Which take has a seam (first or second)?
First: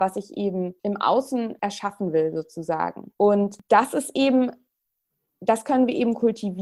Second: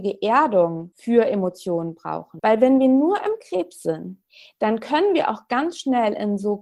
second